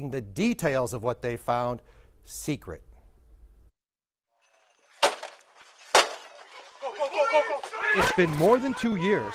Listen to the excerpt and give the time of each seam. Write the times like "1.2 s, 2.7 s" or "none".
none